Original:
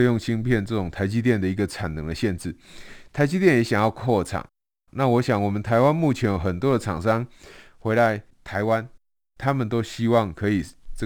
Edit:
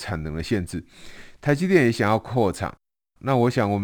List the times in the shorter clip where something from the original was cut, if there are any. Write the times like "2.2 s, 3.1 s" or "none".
none

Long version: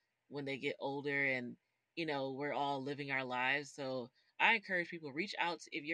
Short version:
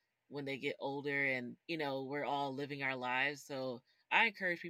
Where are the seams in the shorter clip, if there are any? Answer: 1.6 s

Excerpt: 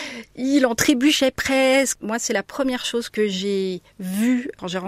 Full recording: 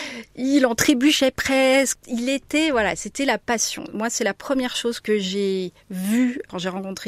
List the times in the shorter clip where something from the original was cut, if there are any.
2.0 s

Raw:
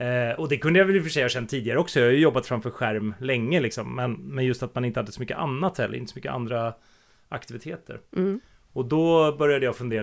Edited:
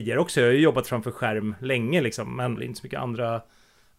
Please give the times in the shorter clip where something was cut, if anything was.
2.6 s

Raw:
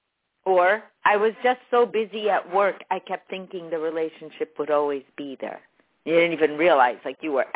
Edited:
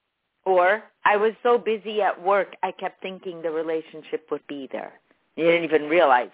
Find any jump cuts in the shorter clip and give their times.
1.4 s, 4.4 s

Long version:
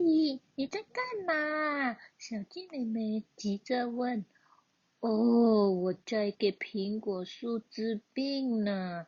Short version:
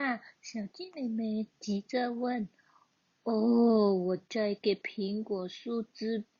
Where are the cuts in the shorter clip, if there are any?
none

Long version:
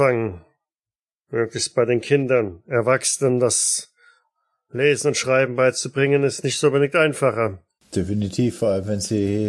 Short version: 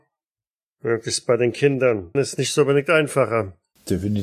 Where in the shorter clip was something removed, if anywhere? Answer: 2.1 s

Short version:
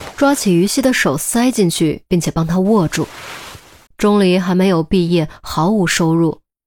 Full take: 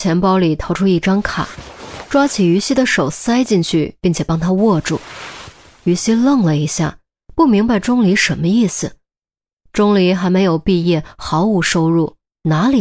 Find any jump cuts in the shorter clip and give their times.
3.9 s

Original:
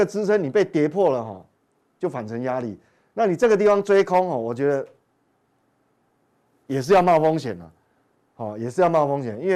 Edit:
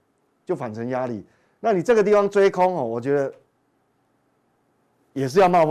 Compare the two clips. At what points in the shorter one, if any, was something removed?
none

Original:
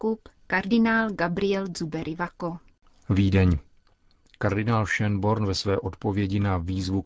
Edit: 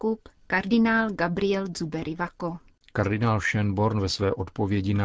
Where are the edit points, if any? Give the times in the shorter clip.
2.8 s

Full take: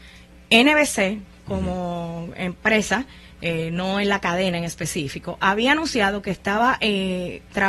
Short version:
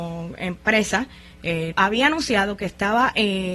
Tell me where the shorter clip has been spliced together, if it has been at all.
1.7 s

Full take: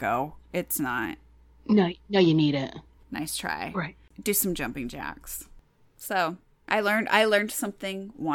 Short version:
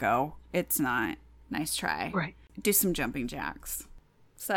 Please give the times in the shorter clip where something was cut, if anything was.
1.4 s

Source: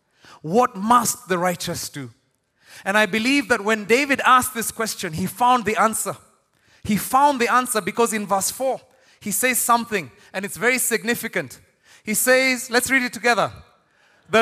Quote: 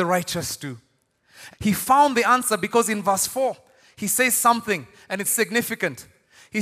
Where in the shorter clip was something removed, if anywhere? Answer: 1.5 s, 5.2 s

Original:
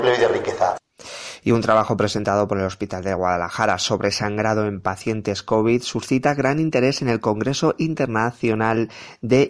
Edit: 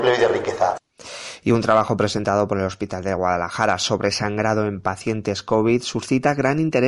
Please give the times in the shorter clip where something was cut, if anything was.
none

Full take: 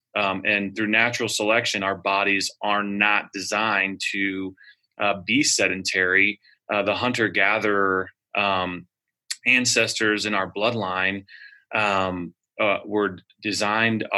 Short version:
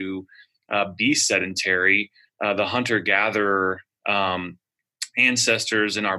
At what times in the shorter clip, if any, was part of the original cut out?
none

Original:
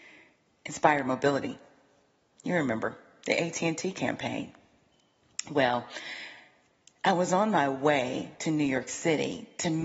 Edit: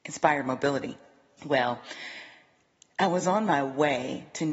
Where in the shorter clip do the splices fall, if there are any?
1.4 s

